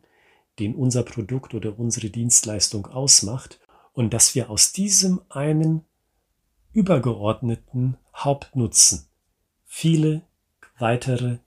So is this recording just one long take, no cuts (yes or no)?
yes